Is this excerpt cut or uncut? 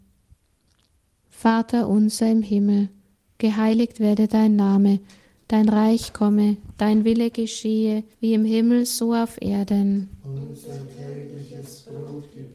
cut